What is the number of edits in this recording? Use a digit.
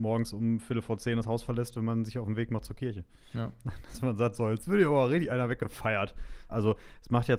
1